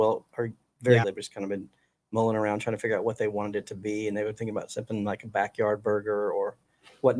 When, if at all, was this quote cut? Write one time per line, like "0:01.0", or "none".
0:01.0